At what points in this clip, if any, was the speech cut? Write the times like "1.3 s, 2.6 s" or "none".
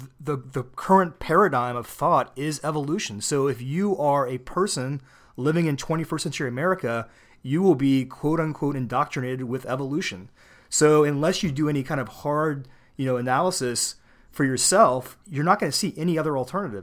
none

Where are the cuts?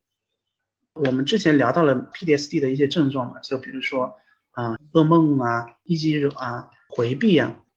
4.8 s

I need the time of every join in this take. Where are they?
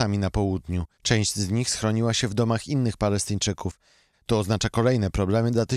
0.9 s, 4.1 s

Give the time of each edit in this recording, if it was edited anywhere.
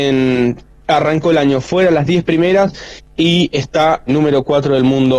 4.1 s

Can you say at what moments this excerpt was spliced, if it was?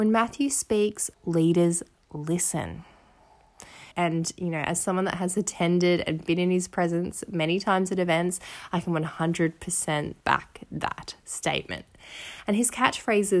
1.1 s, 3.9 s, 10.2 s

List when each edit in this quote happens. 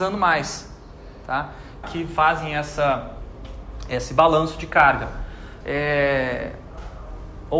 1.8 s, 5.6 s

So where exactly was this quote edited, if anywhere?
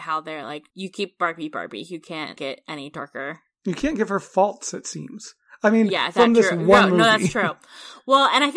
none

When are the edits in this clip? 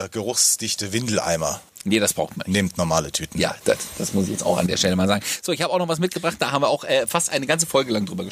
none

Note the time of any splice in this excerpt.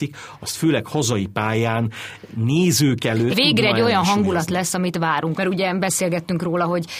3.3 s, 5.3 s

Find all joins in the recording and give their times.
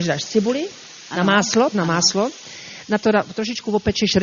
1.7 s

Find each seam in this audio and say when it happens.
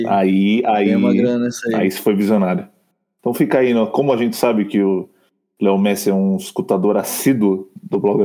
none

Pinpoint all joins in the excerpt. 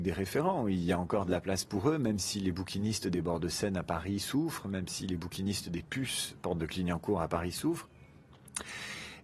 none

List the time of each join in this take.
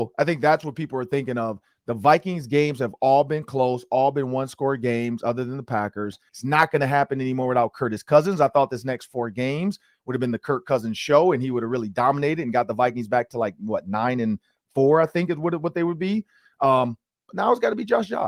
6.3 s

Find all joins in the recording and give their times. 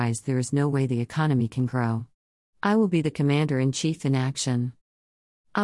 2.4 s

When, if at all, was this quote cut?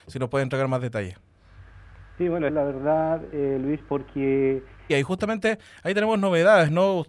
2.5 s, 4.9 s

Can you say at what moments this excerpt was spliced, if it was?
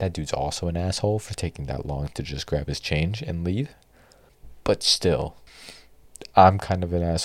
none

